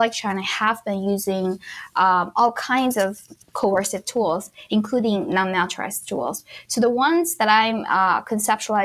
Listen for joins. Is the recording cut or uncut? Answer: cut